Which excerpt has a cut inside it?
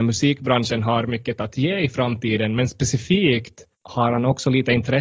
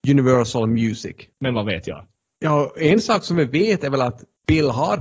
second; 1 cut; at 1.3 s

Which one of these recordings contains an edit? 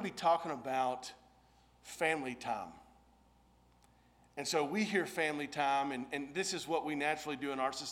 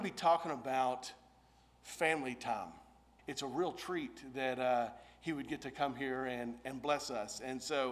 second; 1 cut; at 3.2 s

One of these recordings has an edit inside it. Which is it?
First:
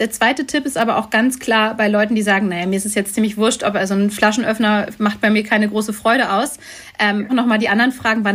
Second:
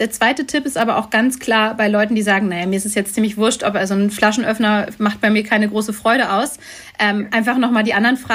first; 1 cut; at 7.3 s

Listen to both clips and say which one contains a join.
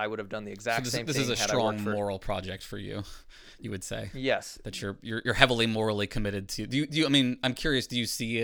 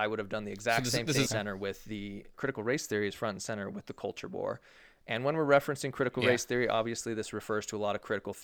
second; 2 cuts; at 1.3 s, 2.3 s

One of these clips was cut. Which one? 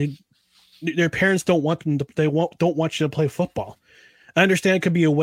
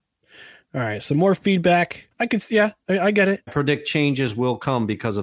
second; 2 cuts; at 2.1 s, 3.5 s

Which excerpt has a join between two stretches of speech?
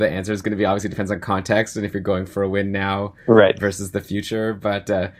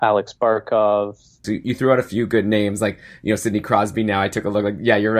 second; 1 cut; at 1.4 s

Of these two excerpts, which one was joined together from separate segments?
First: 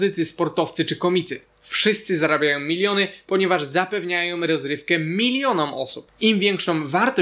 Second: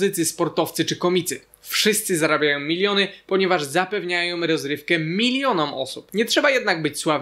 first; 1 cut; at 6.1 s

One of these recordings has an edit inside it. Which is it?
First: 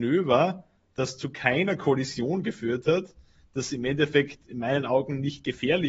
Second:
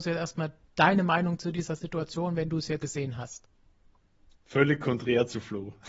second; 1 cut; at 2.8 s

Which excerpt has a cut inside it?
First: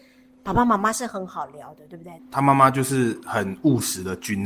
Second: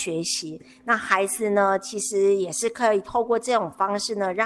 first; 1 cut; at 2.2 s

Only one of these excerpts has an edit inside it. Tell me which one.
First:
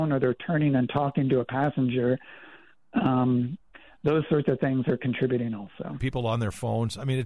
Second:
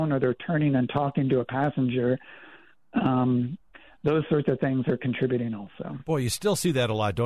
first; 1 cut; at 6.0 s

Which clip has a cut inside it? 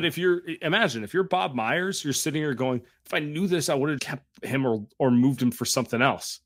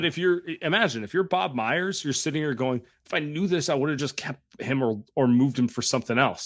first; 1 cut; at 4.0 s

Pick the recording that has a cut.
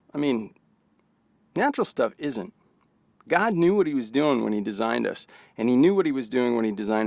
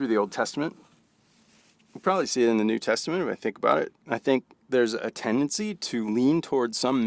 second; 1 cut; at 4.0 s

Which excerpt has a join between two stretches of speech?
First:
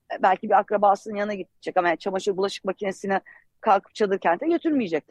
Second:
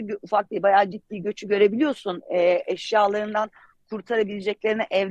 second; 1 cut; at 0.9 s

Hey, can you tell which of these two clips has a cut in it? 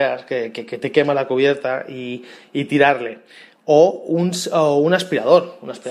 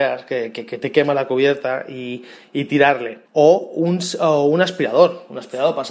second; 1 cut; at 3.3 s

